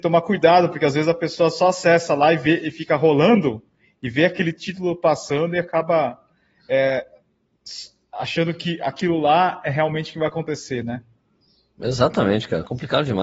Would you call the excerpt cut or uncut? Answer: uncut